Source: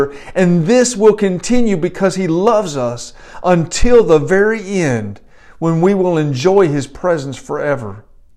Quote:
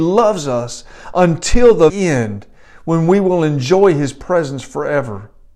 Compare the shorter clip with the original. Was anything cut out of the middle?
yes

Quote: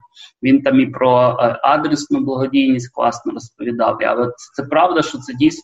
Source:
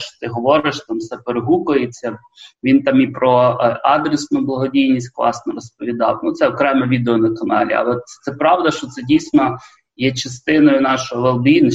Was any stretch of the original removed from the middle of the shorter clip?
yes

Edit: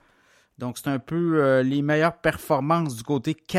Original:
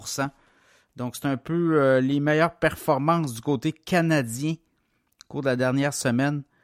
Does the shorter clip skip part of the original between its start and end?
no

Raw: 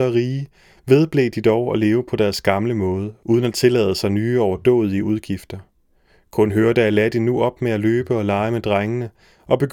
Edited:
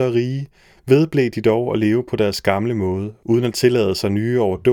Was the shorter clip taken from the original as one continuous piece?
yes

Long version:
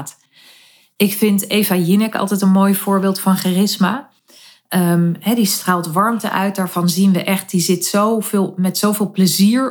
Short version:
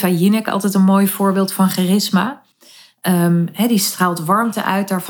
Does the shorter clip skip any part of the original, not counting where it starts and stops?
no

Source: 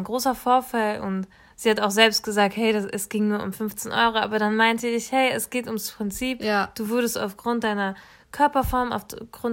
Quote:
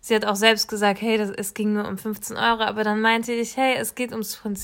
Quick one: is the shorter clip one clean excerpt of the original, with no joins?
yes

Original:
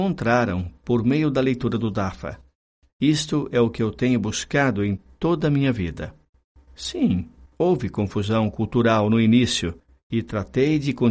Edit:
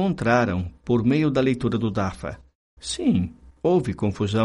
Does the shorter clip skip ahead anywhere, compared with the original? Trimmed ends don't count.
yes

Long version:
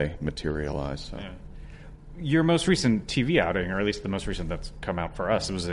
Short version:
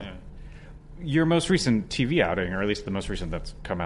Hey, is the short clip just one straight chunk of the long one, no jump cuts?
yes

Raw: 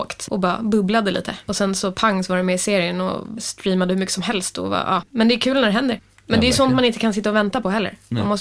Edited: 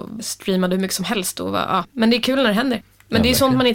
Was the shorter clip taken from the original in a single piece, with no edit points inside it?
yes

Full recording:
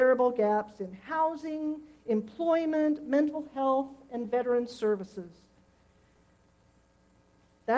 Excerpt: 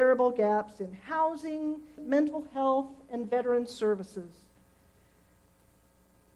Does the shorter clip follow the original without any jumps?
no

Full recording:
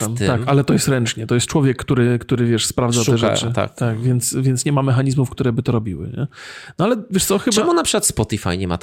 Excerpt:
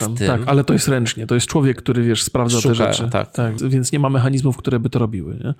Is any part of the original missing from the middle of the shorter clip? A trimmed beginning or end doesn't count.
yes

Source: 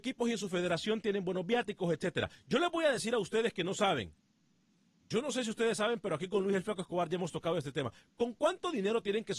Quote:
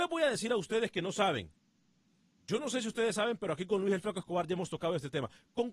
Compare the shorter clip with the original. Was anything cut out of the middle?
no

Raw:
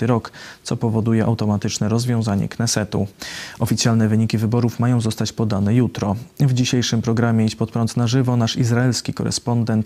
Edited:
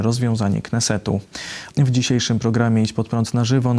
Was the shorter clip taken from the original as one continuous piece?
no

